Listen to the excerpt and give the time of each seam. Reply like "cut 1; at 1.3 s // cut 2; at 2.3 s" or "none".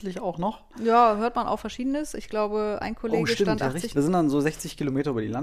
cut 1; at 3.9 s